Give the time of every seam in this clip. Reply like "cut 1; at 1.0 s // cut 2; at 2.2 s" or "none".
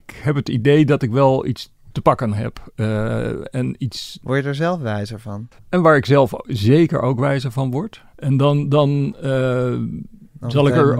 cut 1; at 5.6 s // cut 2; at 8.1 s